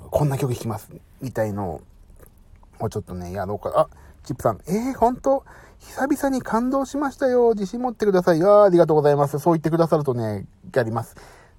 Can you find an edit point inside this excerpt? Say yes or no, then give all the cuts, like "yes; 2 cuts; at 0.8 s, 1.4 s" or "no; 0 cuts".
no; 0 cuts